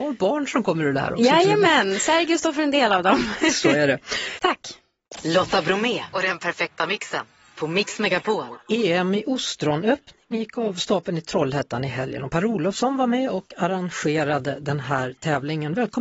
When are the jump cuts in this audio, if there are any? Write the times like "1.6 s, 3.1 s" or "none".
4.3 s